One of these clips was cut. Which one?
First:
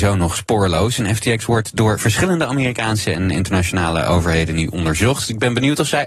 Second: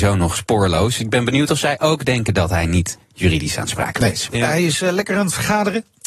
second; 2 cuts; at 1.0 s, 4.3 s

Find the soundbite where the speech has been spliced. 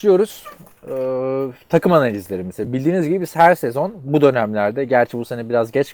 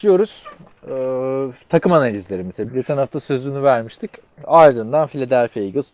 second; 2 cuts; at 2.7 s, 4.4 s

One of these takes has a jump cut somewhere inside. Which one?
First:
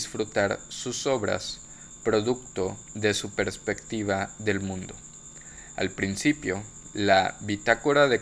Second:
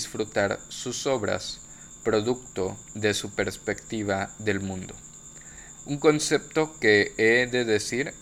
second; 1 cut; at 5.7 s

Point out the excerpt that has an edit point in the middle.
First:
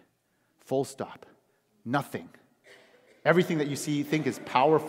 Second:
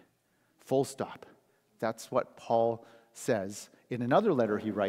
second; 1 cut; at 1.8 s

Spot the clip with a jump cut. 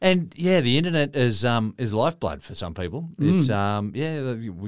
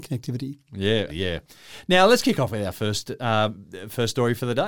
second; 1 cut; at 1.1 s

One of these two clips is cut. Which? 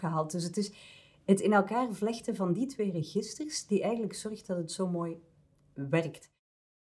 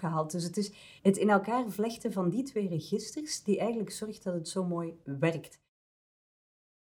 second; 2 cuts; at 1.0 s, 5.0 s

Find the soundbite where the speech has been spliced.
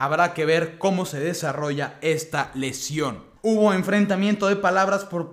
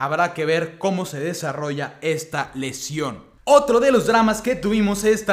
first; 1 cut; at 3.4 s

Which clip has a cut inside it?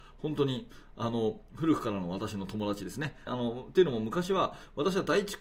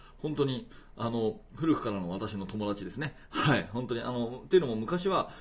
first; 1 cut; at 3.3 s

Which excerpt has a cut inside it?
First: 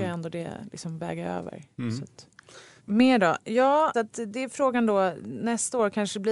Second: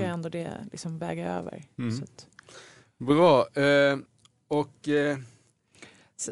first; 2 cuts; at 2.8 s, 3.9 s

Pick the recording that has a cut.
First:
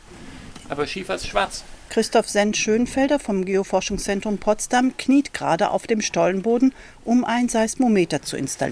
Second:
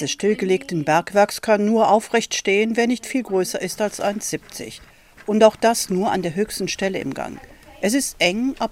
first; 1 cut; at 1.9 s

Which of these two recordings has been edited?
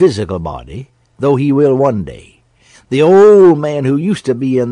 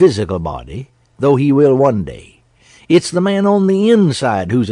first; 1 cut; at 2.7 s

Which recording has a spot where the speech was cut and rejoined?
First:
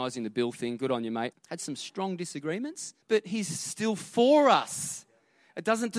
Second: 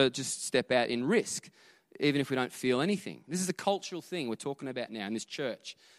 first; 2 cuts; at 1.3 s, 3.0 s

